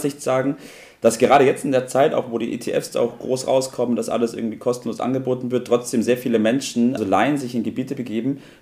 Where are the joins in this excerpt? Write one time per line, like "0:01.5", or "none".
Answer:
0:07.0